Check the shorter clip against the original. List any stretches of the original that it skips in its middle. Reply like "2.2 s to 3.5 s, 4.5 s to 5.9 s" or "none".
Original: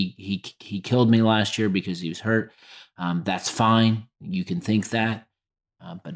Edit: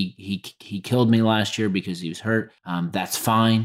2.6 s to 2.9 s